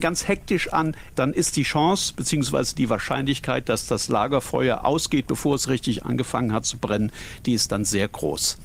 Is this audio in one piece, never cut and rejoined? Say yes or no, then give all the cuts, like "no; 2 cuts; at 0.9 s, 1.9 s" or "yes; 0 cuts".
no; 1 cut; at 1.1 s